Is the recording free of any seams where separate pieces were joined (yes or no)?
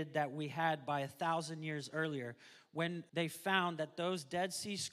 no